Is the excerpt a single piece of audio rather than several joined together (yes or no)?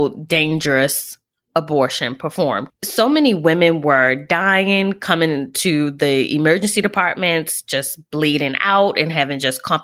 no